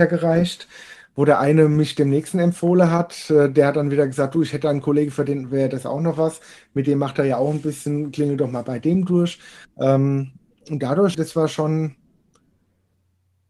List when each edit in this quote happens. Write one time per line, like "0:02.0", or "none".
0:09.6
0:11.1